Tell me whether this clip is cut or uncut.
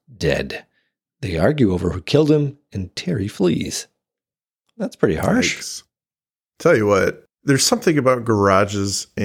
uncut